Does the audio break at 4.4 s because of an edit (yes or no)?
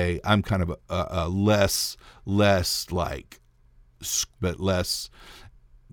yes